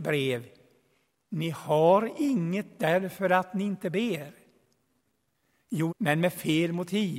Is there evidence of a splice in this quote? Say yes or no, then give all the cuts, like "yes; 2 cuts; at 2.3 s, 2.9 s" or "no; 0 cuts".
yes; 1 cut; at 5.9 s